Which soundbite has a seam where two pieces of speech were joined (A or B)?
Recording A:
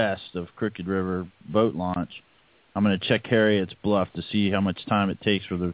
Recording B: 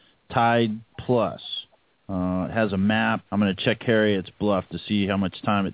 B